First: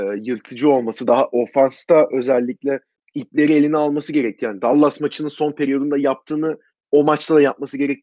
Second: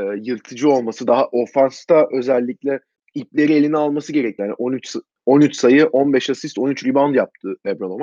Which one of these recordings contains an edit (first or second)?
second